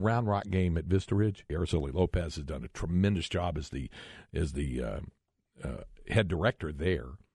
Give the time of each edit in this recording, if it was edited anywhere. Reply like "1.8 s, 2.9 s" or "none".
1.5 s